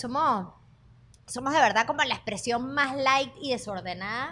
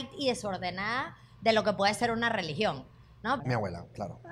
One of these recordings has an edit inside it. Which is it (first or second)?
second